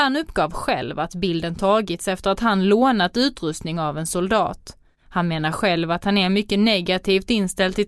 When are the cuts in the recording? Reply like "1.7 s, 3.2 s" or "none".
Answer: none